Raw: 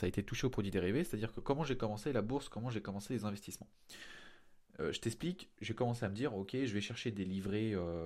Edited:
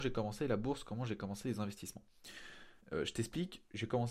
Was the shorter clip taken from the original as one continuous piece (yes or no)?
no